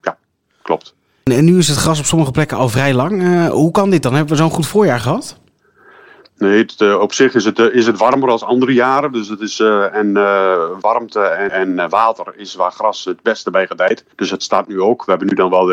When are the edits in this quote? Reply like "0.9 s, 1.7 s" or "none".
11.5 s, 14.1 s